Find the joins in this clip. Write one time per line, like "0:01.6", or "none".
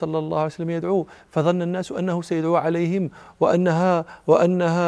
none